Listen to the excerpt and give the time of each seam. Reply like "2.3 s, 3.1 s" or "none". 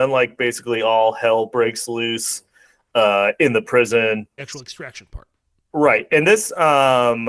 4.4 s